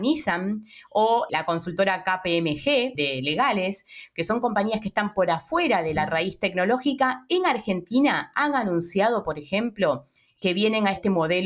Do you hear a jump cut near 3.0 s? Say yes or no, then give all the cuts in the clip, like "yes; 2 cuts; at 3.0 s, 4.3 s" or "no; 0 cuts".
yes; 2 cuts; at 1.3 s, 3.0 s